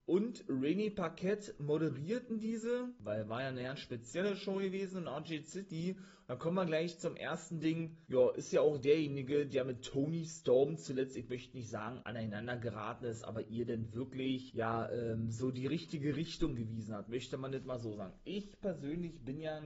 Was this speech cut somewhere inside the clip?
yes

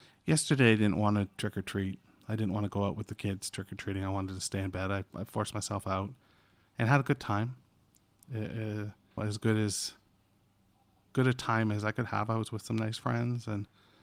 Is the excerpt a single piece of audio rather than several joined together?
no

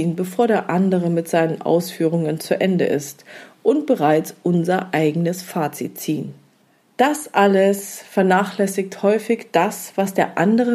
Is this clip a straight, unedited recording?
yes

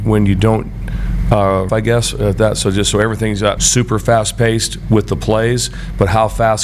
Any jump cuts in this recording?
yes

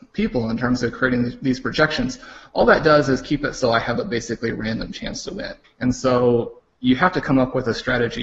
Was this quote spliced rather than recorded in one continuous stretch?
yes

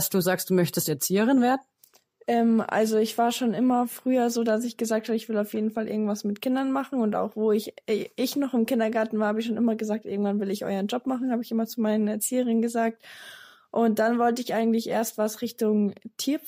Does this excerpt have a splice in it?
no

